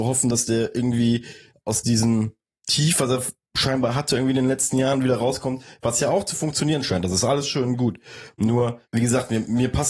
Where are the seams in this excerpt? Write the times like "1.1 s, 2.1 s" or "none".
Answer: 8.8 s